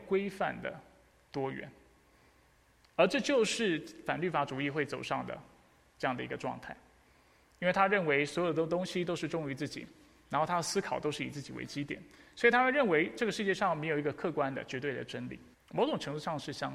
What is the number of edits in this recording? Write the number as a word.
one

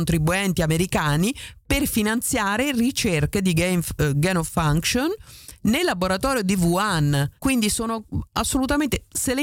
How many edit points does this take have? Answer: one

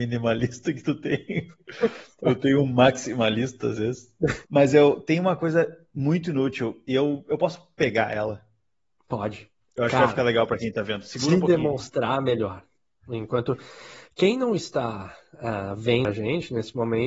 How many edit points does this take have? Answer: one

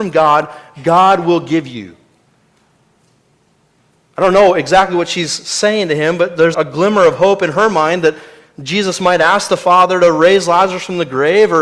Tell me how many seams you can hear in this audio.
one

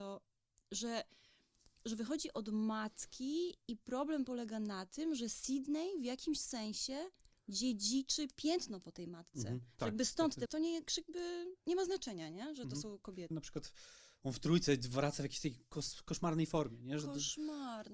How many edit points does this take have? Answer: two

